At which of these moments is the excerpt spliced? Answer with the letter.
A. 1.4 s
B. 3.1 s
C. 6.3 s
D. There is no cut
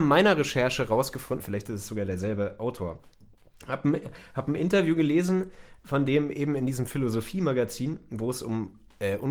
A